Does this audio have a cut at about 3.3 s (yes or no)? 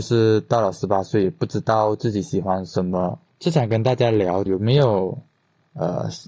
yes